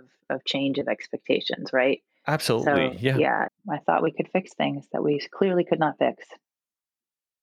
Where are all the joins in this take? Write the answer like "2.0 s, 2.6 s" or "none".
3.5 s